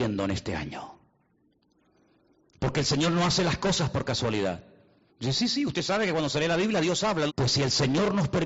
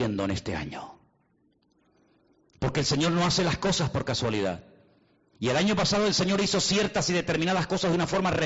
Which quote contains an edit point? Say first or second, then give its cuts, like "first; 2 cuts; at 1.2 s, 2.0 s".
first; 2 cuts; at 5.1 s, 7.3 s